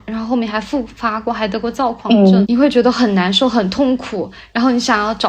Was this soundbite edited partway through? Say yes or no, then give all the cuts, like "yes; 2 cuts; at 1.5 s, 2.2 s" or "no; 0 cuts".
yes; 1 cut; at 2.4 s